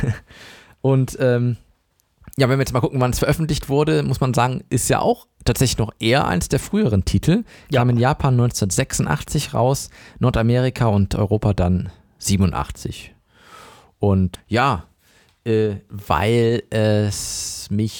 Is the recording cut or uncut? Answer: cut